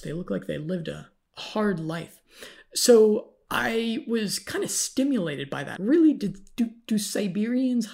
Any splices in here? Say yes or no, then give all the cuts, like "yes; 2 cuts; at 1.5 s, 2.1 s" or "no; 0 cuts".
yes; 1 cut; at 5.8 s